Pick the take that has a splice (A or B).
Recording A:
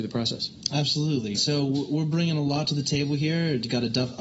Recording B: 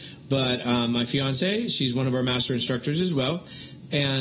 A